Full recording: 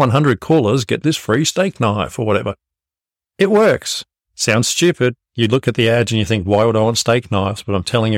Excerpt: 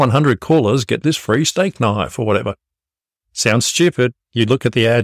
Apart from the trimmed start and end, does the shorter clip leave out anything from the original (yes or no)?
yes